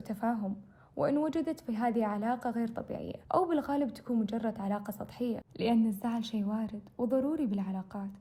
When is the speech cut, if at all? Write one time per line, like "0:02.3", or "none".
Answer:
0:03.2
0:05.5